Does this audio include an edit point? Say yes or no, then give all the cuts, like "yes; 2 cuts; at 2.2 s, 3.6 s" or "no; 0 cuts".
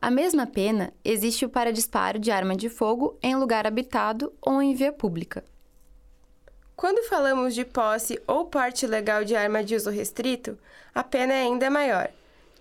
no; 0 cuts